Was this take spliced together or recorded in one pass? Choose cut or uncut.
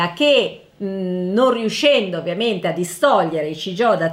uncut